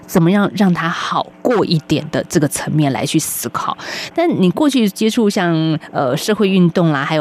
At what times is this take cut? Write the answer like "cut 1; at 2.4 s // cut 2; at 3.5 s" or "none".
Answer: cut 1; at 4.1 s